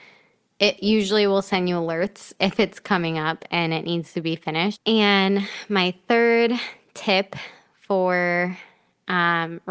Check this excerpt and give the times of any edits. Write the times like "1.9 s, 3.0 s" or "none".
4.7 s

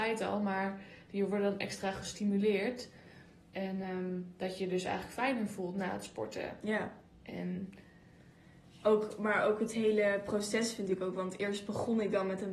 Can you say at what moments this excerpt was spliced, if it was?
none

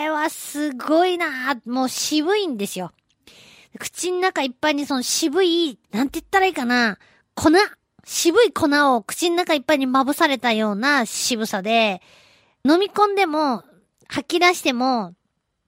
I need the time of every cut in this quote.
5.8 s, 12.6 s

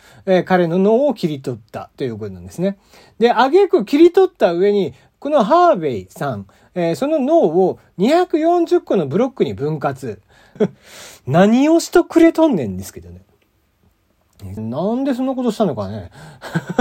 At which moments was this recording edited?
10.6 s, 14.6 s

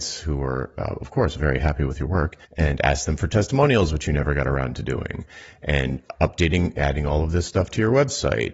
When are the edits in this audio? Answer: 2.4 s

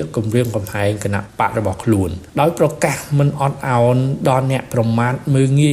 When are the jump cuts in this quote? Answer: 2.3 s

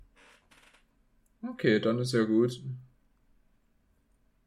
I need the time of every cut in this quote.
none

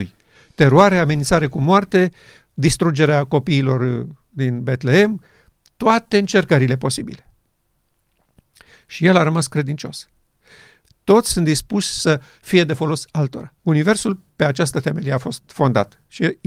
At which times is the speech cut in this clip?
10.8 s, 13.6 s

